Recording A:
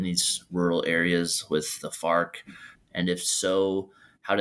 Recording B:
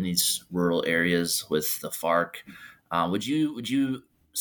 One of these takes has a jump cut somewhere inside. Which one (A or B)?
A